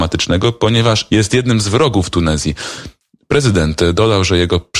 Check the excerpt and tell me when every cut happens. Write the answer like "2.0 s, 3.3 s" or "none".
1.1 s